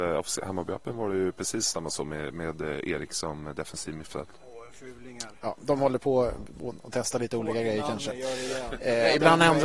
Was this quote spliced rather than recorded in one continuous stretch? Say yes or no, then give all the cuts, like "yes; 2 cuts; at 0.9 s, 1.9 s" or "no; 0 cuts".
no; 0 cuts